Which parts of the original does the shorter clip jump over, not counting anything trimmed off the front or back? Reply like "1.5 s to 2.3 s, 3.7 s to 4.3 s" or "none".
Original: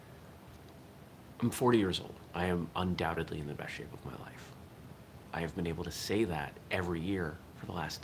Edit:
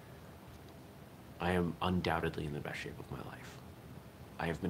1.3 s to 2.3 s